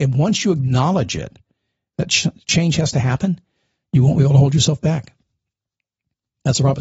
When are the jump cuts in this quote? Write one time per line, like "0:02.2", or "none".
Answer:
none